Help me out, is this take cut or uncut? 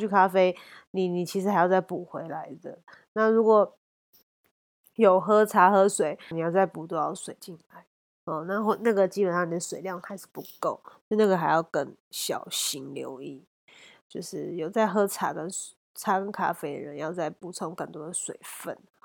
cut